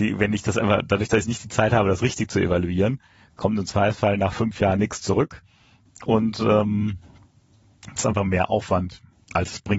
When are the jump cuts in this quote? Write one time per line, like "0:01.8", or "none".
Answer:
none